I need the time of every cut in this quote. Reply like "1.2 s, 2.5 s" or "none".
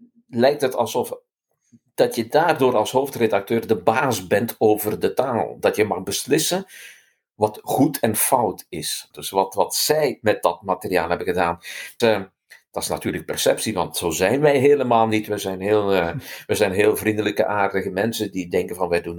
9.1 s, 12.0 s